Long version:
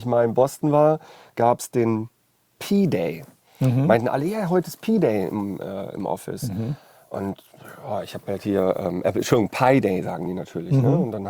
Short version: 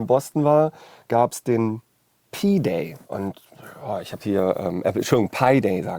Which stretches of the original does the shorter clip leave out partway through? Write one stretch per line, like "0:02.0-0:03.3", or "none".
0:03.3-0:07.1
0:08.2-0:08.4